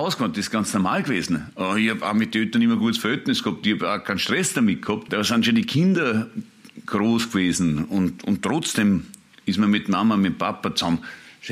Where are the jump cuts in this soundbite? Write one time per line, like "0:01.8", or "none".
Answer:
0:05.1